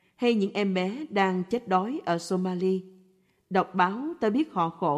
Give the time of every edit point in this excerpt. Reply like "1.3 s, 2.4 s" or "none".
none

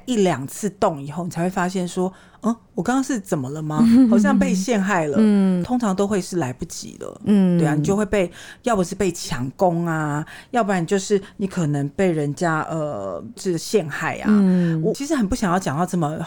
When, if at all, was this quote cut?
none

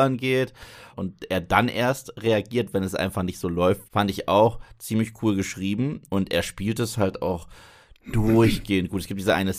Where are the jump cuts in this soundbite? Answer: 0.9 s, 3.8 s

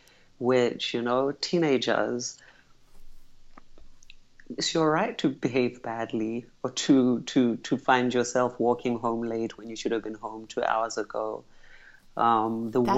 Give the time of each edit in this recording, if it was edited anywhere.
none

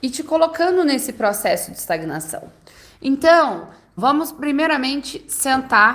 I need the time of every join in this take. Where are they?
4.0 s

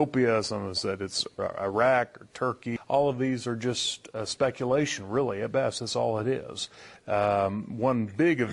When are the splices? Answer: 7.0 s

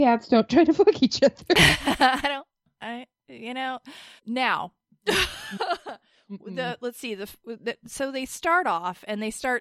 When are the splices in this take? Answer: 4.2 s

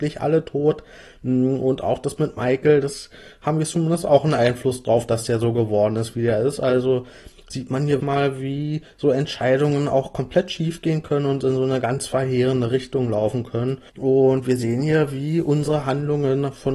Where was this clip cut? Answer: 8.0 s, 13.9 s

